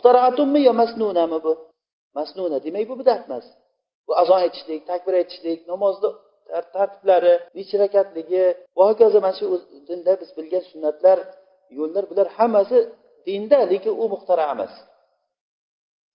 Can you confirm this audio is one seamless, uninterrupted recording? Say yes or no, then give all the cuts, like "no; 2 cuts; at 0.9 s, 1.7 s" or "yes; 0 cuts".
no; 2 cuts; at 7.5 s, 8.7 s